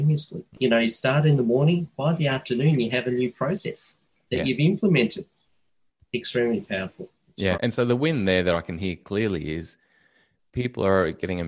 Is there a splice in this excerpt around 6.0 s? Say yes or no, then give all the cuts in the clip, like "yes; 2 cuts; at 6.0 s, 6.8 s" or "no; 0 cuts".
no; 1 cut; at 7.5 s